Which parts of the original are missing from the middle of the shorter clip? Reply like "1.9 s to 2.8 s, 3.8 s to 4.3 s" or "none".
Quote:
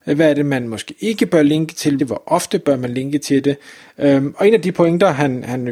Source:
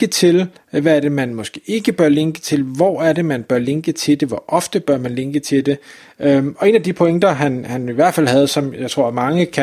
2.6 s to 4.2 s